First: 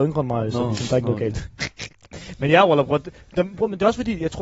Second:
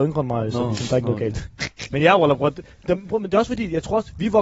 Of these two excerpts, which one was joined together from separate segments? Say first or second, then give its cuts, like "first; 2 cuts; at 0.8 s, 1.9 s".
second; 1 cut; at 1.9 s